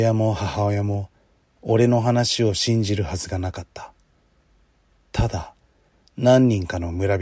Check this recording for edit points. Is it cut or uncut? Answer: uncut